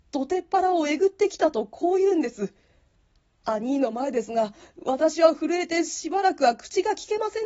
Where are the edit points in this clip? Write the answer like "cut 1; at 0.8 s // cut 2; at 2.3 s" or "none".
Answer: none